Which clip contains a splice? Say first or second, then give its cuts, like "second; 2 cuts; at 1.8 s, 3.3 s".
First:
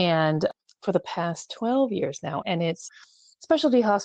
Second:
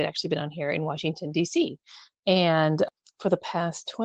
first; 1 cut; at 2.4 s